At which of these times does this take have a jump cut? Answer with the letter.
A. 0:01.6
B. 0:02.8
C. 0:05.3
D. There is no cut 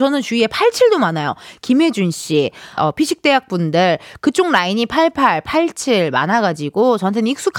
B